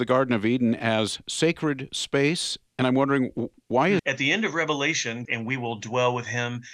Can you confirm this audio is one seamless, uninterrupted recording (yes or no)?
no